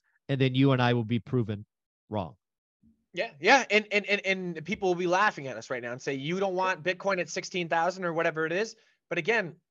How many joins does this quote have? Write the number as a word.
zero